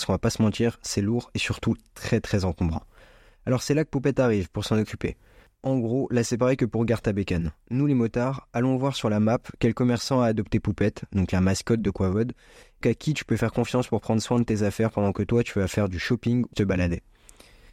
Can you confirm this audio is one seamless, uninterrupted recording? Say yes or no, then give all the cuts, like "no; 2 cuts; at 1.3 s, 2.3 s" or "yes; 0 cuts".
no; 2 cuts; at 12.8 s, 16.5 s